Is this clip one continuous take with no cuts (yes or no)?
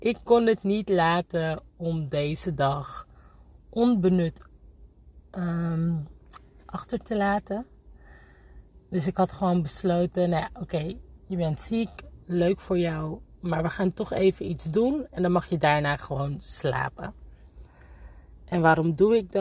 yes